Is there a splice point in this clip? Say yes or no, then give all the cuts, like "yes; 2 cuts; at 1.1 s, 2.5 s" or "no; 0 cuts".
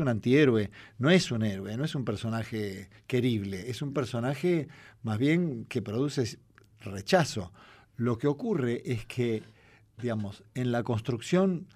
no; 0 cuts